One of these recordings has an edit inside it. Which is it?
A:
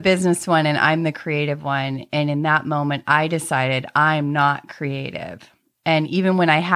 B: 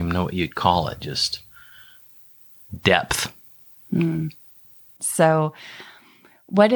B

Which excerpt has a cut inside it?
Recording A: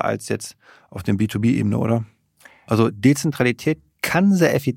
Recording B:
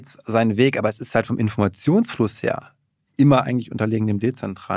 A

